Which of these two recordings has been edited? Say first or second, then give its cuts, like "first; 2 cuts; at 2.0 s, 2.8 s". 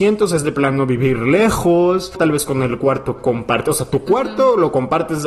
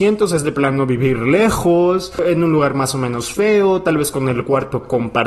first; 1 cut; at 2.2 s